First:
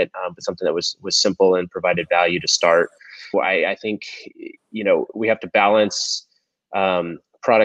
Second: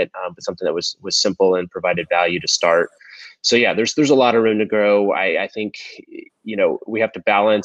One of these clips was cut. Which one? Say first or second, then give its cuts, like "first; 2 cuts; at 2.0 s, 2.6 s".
first; 1 cut; at 3.3 s